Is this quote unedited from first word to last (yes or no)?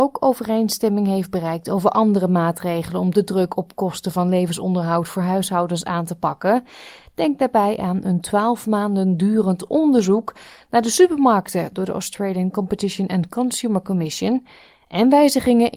yes